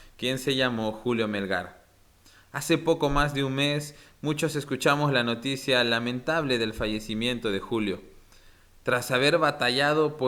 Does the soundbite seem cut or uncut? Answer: uncut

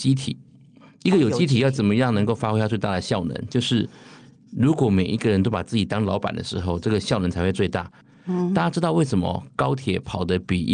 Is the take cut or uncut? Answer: uncut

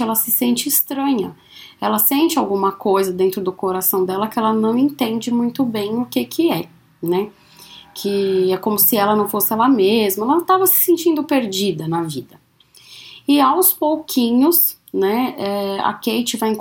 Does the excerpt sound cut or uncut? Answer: uncut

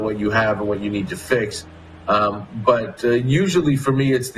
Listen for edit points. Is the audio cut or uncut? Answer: uncut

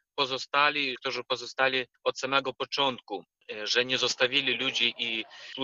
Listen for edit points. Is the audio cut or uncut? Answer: cut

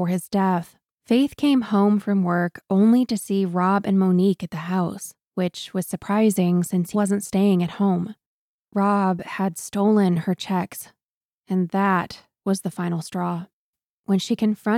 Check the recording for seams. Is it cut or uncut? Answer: cut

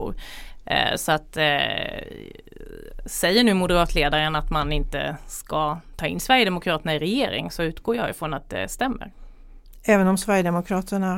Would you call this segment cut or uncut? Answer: uncut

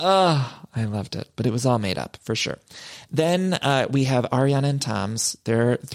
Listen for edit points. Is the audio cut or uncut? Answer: uncut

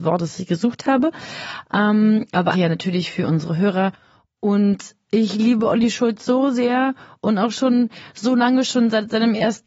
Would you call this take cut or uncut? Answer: cut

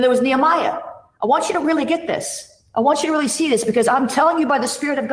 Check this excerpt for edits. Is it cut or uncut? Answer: uncut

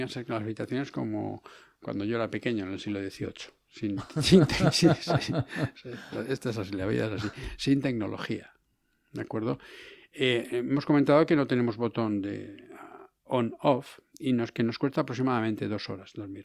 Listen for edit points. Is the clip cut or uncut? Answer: uncut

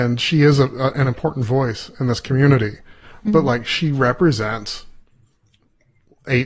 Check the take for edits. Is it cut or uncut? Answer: uncut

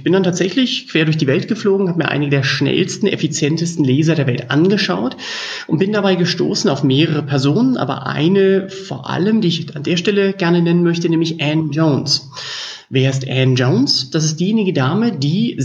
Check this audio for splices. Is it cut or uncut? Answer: uncut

